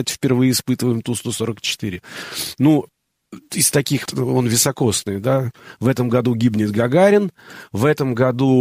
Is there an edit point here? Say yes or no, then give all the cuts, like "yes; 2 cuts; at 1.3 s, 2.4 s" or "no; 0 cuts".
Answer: yes; 1 cut; at 4.1 s